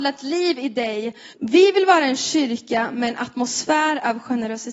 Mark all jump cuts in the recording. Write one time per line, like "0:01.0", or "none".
0:01.3